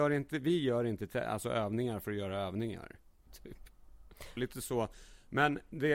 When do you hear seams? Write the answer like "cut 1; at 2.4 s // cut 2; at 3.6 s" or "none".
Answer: cut 1; at 3.3 s // cut 2; at 4.4 s